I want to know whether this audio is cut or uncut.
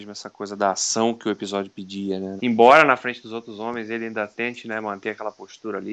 cut